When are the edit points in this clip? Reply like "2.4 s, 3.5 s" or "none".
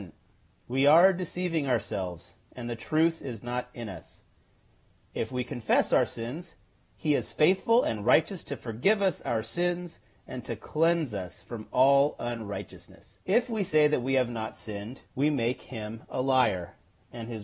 13.2 s, 15.1 s